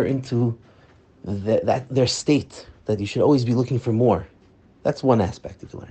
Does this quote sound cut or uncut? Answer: uncut